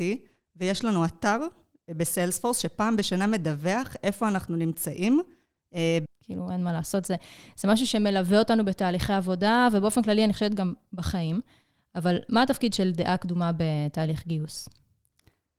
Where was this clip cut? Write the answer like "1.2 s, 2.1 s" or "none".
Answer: 6.1 s

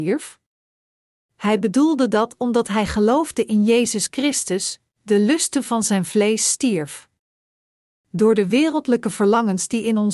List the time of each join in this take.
none

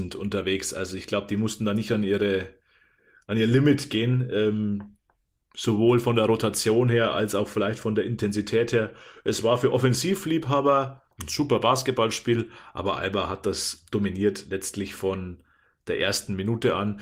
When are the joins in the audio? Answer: 11.1 s

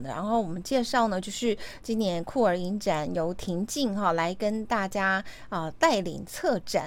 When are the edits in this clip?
none

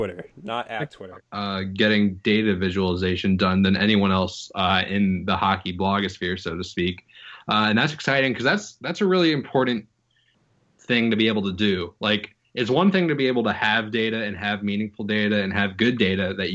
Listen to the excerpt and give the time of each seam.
1.2 s

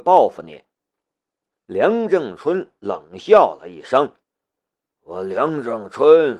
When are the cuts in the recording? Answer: 1.5 s, 4.2 s

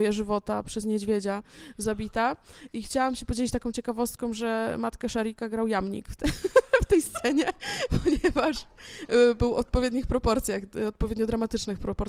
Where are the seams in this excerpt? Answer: none

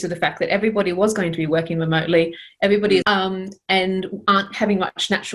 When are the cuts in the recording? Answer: 3.0 s

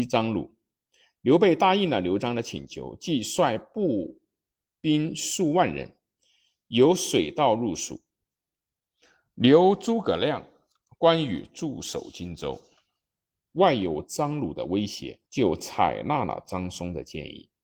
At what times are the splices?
13.5 s, 15.2 s

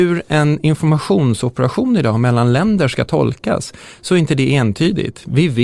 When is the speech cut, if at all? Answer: none

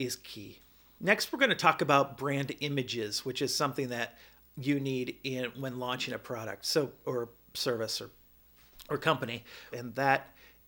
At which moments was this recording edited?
9.7 s

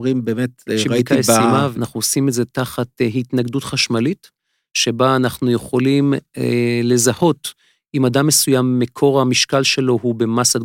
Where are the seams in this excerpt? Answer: 1.7 s

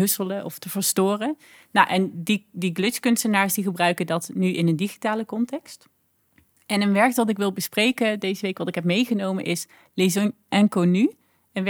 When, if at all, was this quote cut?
none

